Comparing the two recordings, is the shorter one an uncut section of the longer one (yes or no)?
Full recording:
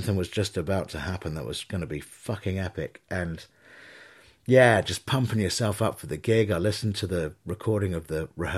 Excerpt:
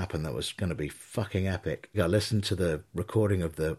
no